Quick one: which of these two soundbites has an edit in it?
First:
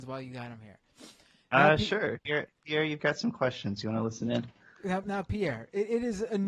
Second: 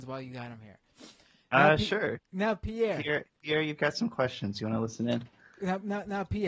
first; 2 cuts; at 2.2 s, 5.0 s

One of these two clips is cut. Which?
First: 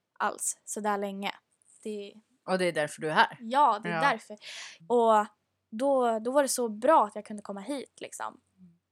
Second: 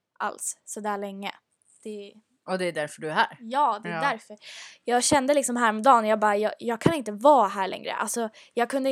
first; 1 cut; at 4.8 s

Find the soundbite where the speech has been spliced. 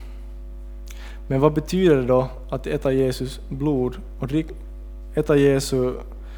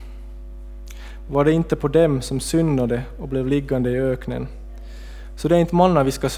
second; 1 cut; at 1.3 s

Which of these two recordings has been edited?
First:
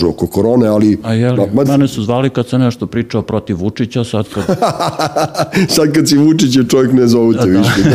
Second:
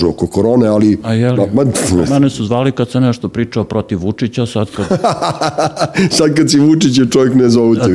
first; 1 cut; at 1.6 s

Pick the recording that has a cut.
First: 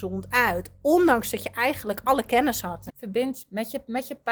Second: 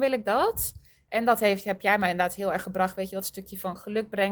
first; 1 cut; at 2.9 s

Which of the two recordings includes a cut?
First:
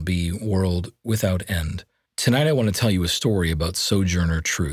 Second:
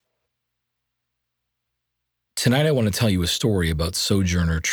first; 1 cut; at 2.1 s

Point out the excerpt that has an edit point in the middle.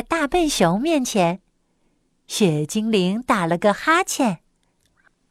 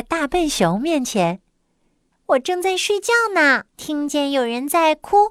second; 2 cuts; at 2.1 s, 3.7 s

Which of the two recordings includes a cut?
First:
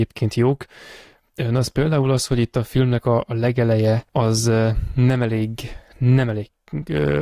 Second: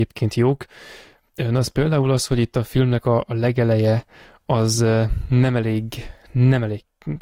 first; 1 cut; at 4.1 s

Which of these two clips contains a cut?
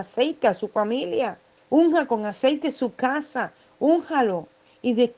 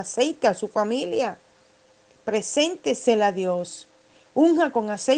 first; 1 cut; at 1.6 s

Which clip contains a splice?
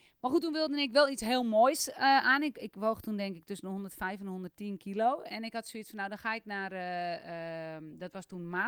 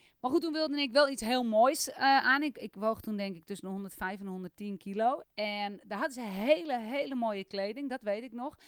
second; 1 cut; at 5.2 s

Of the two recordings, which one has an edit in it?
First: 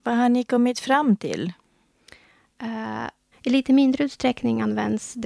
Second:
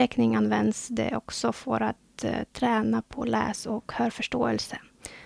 first; 1 cut; at 3.3 s

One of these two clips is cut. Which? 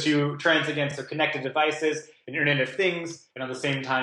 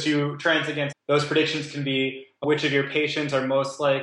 second; 1 cut; at 0.9 s

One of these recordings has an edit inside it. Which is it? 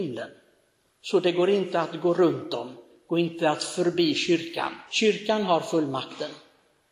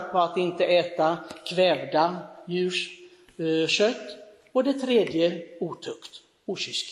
first; 1 cut; at 4.9 s

